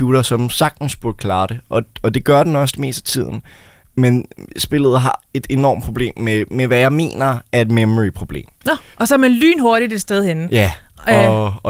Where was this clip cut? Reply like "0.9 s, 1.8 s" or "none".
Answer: 8.9 s